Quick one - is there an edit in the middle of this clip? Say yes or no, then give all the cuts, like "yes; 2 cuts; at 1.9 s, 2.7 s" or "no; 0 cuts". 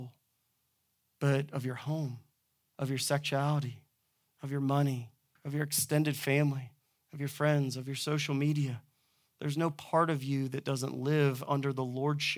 yes; 1 cut; at 5.4 s